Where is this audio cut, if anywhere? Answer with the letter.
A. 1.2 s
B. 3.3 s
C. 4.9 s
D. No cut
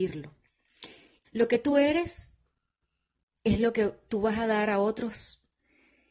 A